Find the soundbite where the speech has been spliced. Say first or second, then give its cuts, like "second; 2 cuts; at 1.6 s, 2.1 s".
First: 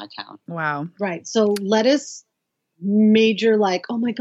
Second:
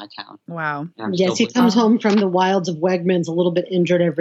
second; 1 cut; at 0.9 s